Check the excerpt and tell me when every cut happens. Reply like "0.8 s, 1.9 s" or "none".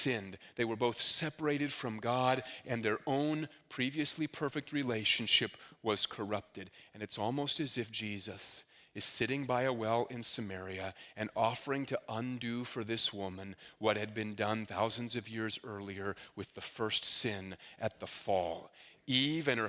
none